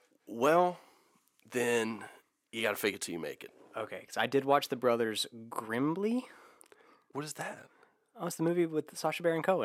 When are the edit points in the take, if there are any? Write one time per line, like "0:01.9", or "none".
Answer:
none